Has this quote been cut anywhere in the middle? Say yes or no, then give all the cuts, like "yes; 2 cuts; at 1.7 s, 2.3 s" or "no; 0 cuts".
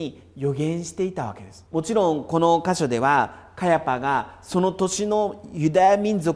yes; 1 cut; at 1.7 s